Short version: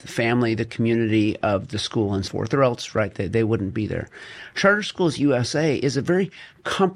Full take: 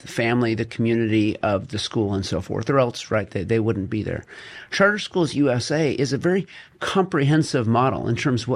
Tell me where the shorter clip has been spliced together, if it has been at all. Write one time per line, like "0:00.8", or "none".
0:02.3